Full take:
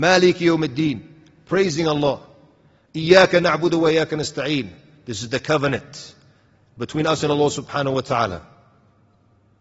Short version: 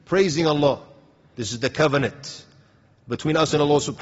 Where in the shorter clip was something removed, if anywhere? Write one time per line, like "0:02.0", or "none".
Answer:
0:01.3